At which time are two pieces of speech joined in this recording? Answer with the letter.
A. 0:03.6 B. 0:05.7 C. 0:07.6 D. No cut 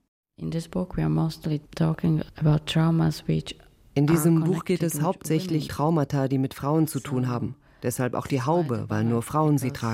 B